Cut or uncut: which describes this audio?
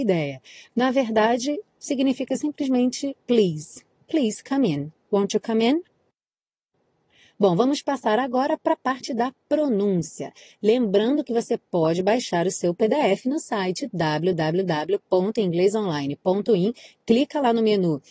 uncut